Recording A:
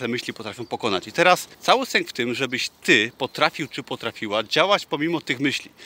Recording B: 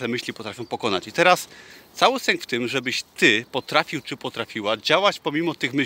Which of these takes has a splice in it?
A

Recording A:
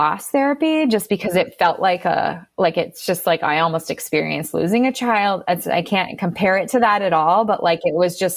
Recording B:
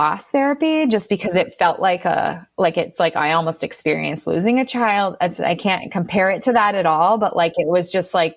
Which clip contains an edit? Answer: B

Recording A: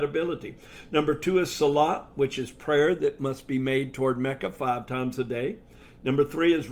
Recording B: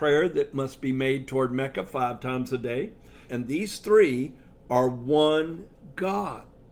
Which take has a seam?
B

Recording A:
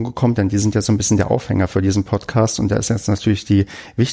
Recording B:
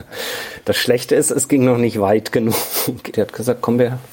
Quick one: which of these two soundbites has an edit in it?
B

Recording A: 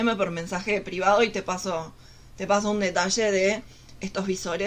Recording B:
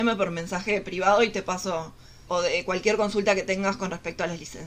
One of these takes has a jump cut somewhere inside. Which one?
B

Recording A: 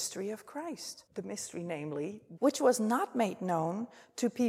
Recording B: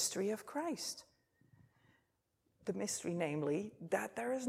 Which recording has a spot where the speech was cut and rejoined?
A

